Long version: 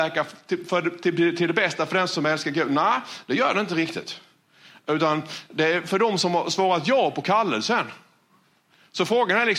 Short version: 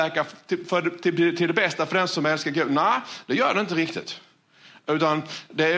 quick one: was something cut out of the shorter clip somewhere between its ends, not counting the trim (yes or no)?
no